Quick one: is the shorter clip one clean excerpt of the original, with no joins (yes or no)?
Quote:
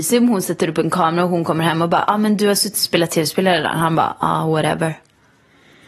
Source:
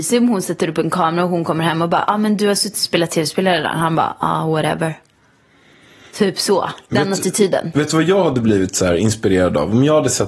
yes